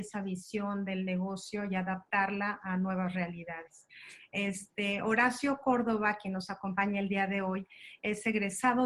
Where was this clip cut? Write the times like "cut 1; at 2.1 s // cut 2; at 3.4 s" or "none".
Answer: none